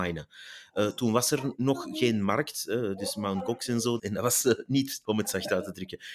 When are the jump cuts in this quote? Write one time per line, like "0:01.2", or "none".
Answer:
0:04.0
0:05.0